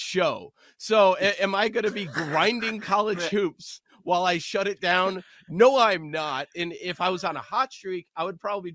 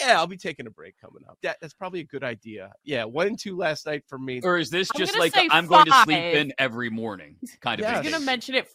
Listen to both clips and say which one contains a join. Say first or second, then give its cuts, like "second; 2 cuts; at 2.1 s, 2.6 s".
second; 2 cuts; at 1.4 s, 4.4 s